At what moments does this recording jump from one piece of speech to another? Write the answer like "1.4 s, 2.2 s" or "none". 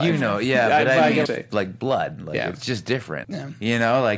1.3 s, 3.2 s